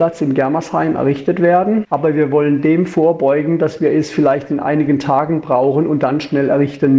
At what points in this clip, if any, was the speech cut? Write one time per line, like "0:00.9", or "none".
0:01.9